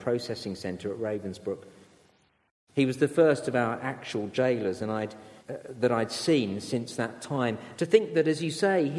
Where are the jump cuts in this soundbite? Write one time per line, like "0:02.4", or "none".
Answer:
0:05.4
0:07.8